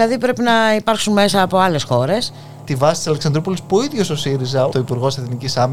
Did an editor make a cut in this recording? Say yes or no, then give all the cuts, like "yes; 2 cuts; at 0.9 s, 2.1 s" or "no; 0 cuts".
yes; 2 cuts; at 2.7 s, 4.7 s